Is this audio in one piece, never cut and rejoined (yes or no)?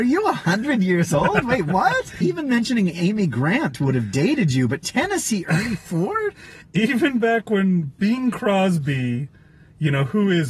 no